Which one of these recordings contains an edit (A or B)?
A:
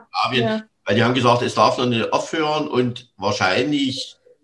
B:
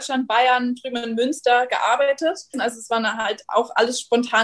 B